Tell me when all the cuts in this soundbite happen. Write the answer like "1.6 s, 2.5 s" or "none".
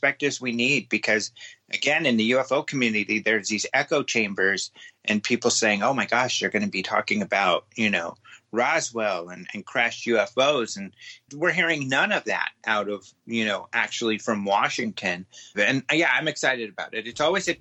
11.3 s, 15.5 s